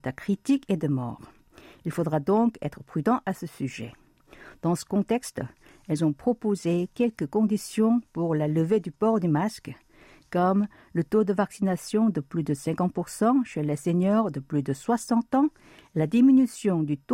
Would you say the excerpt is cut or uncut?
uncut